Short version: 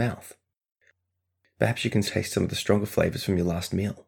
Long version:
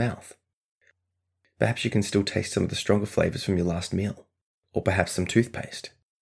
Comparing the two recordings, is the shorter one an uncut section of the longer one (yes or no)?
no